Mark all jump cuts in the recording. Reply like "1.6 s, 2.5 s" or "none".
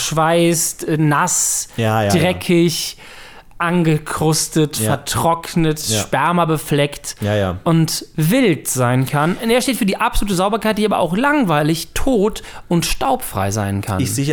none